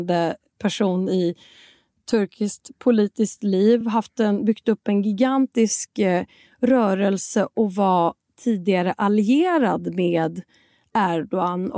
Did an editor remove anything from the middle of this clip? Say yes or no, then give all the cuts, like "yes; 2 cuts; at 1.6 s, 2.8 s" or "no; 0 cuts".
no; 0 cuts